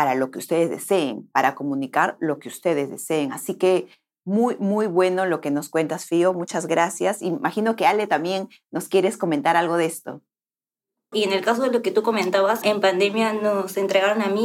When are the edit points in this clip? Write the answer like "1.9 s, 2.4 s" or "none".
11.1 s, 12.6 s